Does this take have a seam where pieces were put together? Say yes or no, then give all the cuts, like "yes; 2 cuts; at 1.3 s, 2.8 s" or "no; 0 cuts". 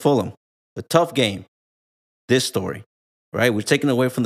yes; 1 cut; at 2.2 s